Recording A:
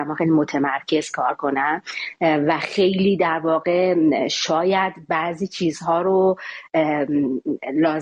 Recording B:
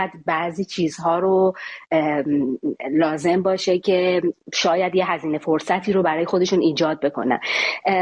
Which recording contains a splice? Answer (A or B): B